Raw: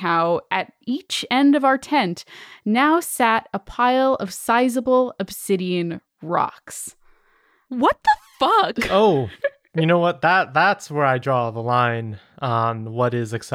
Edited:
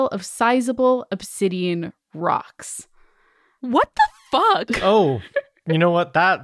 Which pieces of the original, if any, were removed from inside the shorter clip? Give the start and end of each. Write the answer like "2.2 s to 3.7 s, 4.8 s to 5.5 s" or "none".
none